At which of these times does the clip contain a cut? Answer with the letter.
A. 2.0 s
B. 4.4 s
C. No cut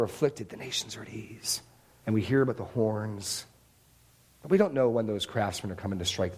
A